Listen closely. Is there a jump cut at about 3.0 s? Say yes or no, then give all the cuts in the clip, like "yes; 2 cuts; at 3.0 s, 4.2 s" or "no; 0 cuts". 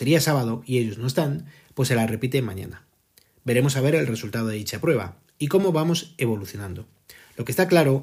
no; 0 cuts